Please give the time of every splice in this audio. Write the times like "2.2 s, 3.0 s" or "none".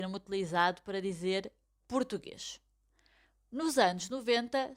none